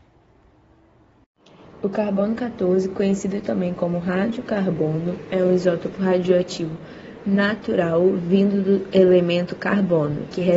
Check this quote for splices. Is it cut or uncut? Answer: uncut